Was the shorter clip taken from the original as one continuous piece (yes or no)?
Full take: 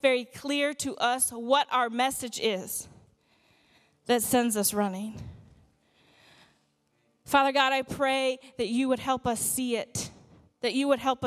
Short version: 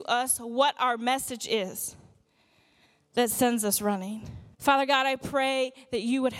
no